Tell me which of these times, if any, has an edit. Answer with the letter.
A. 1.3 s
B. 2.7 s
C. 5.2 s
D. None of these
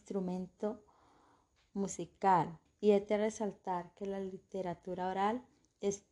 B